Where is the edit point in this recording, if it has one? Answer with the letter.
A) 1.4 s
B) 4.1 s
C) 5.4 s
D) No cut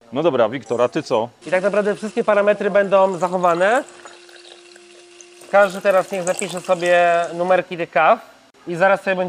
A